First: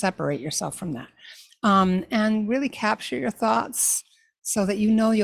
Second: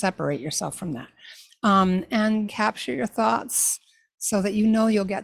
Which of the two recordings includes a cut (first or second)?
second